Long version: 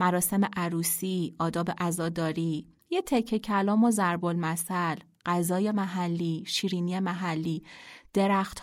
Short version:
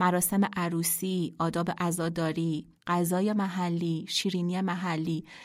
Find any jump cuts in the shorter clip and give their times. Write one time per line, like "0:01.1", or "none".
0:02.8